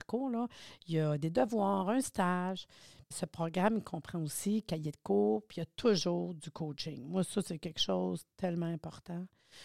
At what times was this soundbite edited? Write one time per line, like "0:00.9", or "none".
0:03.1